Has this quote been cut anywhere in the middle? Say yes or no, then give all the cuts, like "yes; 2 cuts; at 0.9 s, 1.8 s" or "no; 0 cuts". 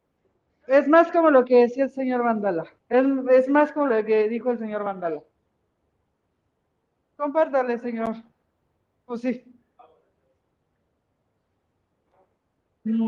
yes; 1 cut; at 2.8 s